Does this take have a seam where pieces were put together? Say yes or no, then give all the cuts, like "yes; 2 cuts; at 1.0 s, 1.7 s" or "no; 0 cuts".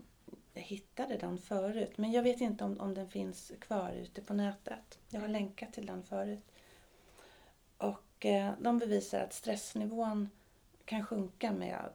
no; 0 cuts